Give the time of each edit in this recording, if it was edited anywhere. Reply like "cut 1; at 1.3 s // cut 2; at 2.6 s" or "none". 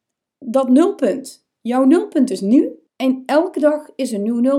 cut 1; at 2.9 s